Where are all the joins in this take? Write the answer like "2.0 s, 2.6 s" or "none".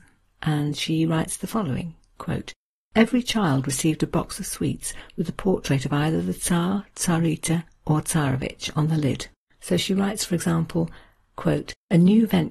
9.4 s